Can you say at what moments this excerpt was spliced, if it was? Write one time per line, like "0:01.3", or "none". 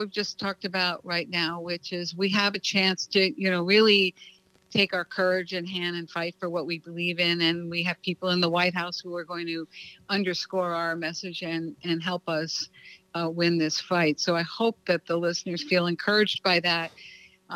none